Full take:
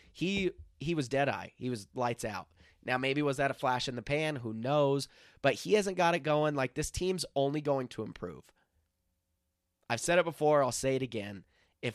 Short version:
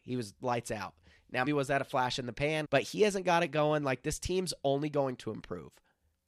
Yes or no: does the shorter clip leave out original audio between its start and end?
yes